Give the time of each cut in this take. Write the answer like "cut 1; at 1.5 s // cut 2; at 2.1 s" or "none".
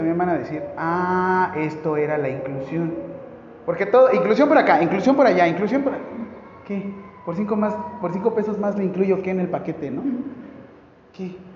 none